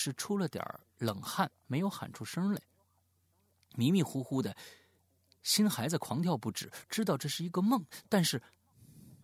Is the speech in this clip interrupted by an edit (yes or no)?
no